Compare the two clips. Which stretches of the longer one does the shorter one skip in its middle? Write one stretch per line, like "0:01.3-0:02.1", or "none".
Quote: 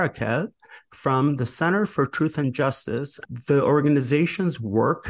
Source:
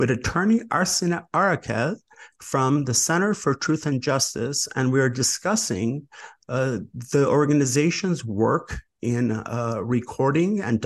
0:04.7-0:06.9